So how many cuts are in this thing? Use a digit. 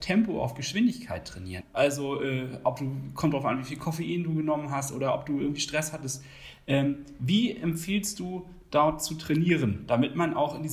1